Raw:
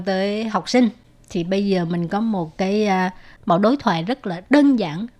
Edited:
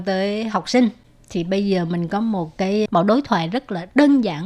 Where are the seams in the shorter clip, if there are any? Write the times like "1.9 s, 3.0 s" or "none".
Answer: 2.9 s